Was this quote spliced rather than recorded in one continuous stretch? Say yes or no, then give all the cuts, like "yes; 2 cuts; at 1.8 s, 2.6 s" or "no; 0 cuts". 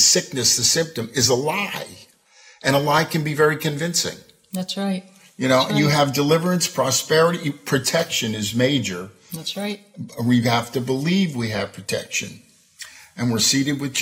no; 0 cuts